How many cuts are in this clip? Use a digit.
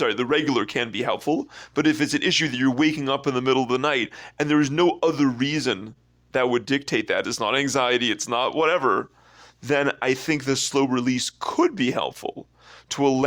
1